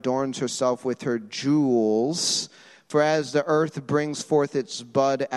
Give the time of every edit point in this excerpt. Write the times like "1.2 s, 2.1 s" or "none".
none

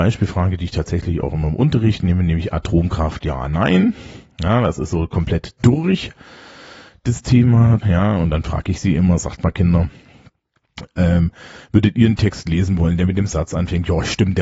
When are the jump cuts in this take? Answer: 7.8 s

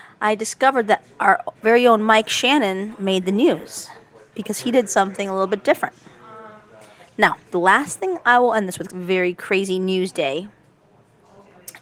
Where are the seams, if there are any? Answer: 7.0 s, 8.9 s

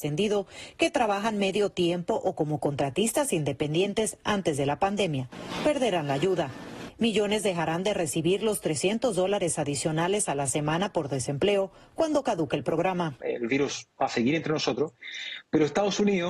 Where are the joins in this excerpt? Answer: none

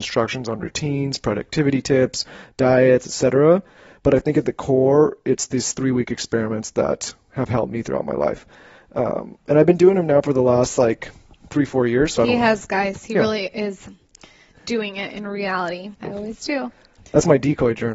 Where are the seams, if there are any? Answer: 15.9 s

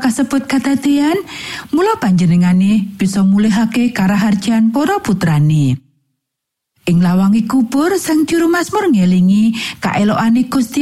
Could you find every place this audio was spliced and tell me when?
none

